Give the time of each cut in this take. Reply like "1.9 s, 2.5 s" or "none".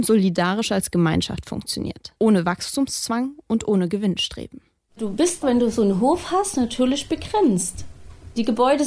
2.2 s